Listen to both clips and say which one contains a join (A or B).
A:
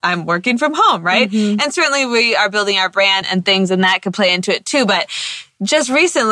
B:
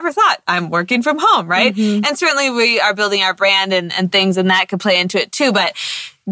A